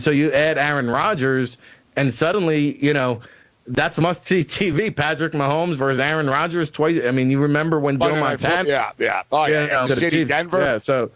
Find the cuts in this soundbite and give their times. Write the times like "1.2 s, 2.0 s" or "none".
8.6 s, 9.9 s